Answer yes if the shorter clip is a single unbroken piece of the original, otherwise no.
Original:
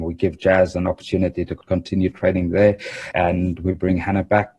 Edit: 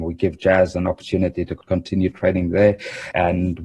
yes